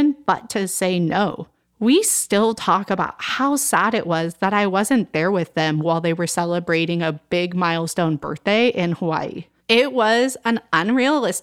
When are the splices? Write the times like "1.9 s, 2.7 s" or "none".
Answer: 9.6 s